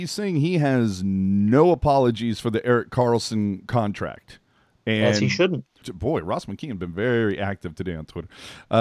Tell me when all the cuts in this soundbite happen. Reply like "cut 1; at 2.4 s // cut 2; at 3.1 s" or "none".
cut 1; at 5.8 s